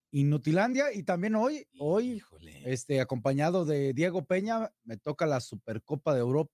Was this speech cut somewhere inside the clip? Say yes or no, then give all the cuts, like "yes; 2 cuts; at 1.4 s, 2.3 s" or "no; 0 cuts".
no; 0 cuts